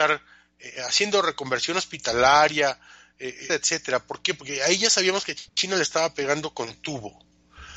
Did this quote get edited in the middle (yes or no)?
yes